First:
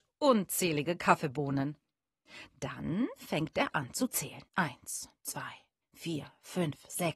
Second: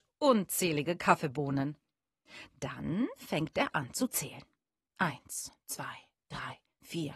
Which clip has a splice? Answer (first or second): first